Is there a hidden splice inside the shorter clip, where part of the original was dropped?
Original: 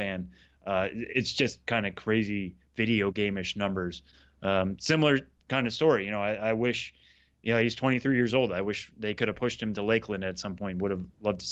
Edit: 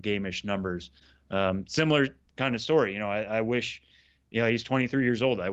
no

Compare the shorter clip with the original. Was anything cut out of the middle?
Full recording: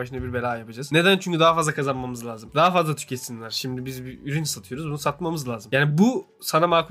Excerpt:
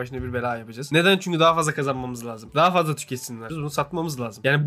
yes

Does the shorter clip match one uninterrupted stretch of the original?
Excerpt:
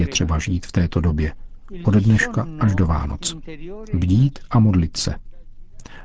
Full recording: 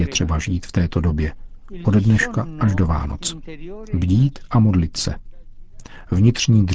yes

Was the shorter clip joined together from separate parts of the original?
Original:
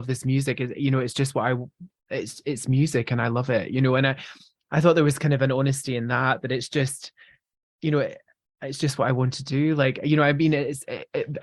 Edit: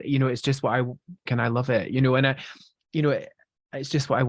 yes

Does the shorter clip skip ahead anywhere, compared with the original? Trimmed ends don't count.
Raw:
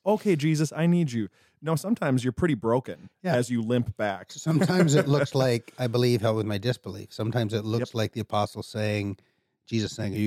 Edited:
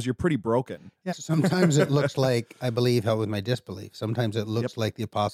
yes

